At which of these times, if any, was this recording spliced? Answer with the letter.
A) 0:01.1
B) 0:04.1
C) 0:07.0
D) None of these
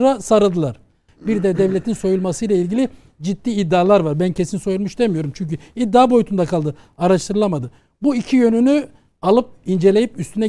A